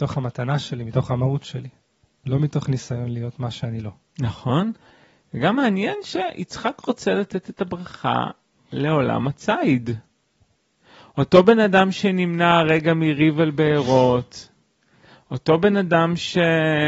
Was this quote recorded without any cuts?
yes; 0 cuts

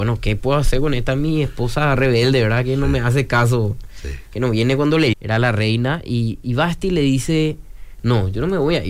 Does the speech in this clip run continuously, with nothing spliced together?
no; 1 cut; at 5.1 s

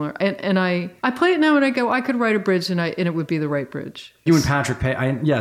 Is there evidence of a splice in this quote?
yes; 2 cuts; at 1.0 s, 4.3 s

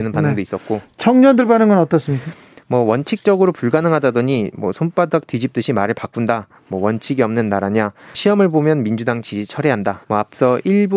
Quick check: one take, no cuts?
no; 2 cuts; at 8.1 s, 10.0 s

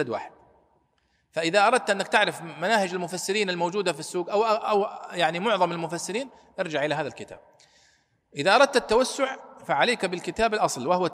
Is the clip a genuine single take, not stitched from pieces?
yes; 0 cuts

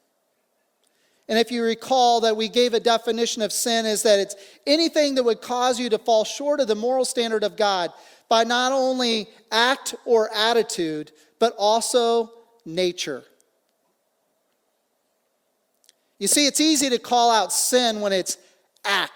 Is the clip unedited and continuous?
yes; 0 cuts

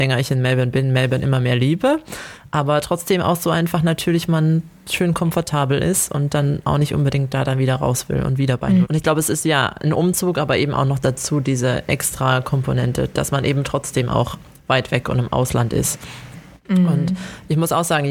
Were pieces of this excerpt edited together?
yes; 1 cut; at 8.8 s

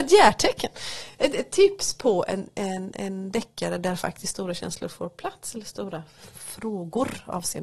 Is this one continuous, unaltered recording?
yes; 0 cuts

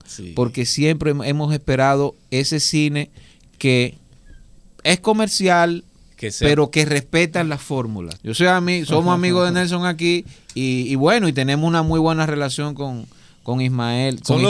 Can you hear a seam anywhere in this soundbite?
yes; 1 cut; at 8.2 s

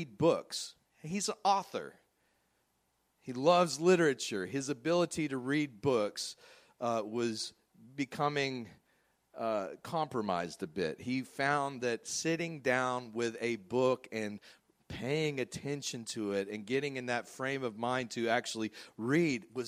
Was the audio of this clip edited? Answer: no; 0 cuts

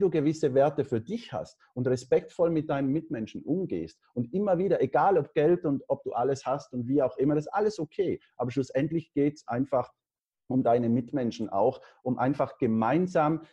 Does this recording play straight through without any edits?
yes; 0 cuts

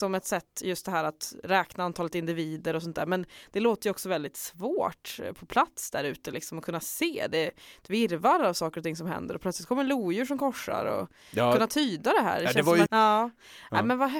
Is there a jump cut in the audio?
yes; 1 cut; at 12.9 s

